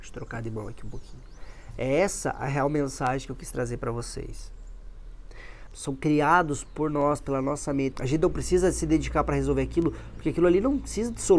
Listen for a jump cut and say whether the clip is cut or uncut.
cut